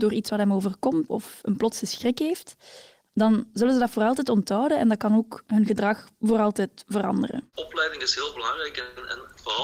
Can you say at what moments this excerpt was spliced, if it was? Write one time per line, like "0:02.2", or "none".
0:01.1